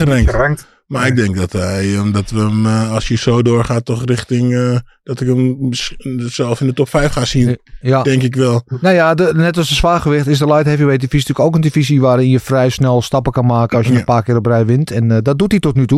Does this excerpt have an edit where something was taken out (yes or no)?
no